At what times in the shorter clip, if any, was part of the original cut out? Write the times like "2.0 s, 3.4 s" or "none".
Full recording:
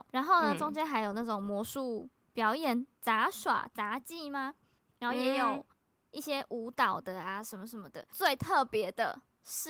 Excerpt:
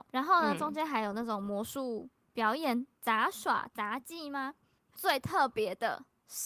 4.9 s